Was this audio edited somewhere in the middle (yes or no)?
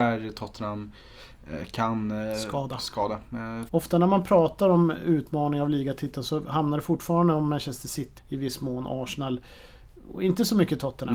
yes